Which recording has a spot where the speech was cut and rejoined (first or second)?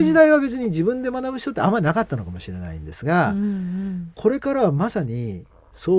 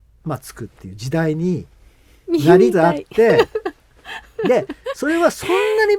second